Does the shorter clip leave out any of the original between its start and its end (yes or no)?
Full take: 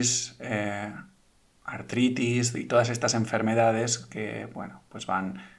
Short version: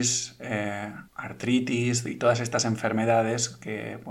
yes